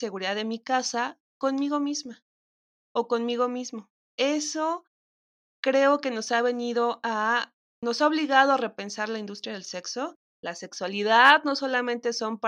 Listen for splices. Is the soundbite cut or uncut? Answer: cut